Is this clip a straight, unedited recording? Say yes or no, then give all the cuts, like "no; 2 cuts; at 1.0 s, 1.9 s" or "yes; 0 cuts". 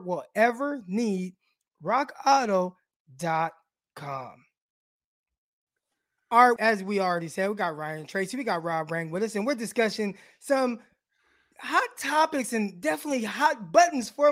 no; 1 cut; at 6.6 s